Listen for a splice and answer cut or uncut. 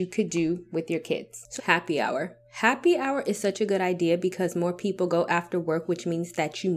cut